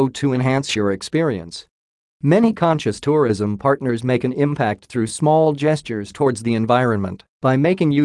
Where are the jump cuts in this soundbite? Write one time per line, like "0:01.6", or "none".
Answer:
0:02.0